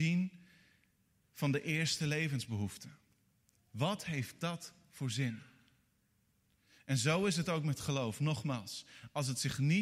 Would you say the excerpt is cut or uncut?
uncut